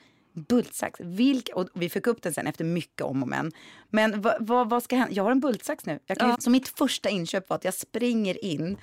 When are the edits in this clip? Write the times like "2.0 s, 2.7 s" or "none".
6.3 s

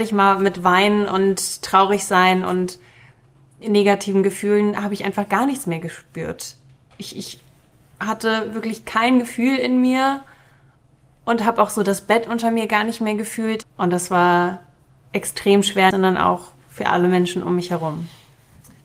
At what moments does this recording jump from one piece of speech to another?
13.6 s, 15.9 s

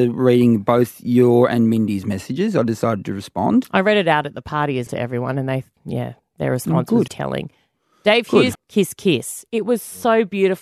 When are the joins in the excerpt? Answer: 4.9 s, 7.1 s, 8.6 s

